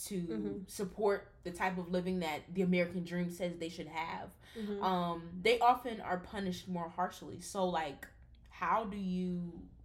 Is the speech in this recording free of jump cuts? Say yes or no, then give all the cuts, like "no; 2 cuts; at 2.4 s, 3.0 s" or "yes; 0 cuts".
yes; 0 cuts